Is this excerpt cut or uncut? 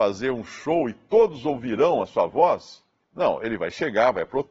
cut